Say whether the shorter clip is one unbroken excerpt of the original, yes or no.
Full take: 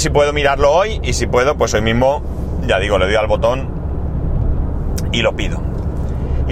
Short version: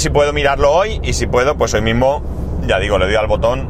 yes